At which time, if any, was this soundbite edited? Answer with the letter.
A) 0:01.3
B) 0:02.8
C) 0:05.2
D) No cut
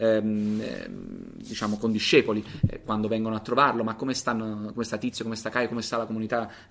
D